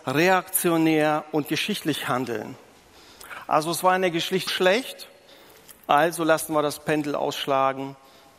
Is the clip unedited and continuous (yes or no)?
no